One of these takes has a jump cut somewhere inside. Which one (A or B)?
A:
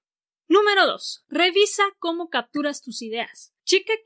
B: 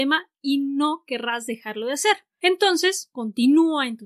B